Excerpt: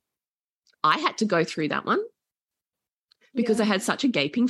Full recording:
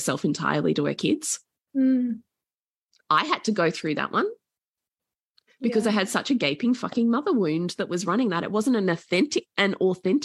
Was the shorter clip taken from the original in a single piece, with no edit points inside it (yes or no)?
yes